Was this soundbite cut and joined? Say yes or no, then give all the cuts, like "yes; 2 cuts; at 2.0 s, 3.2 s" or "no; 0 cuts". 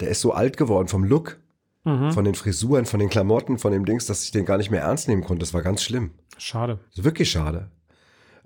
no; 0 cuts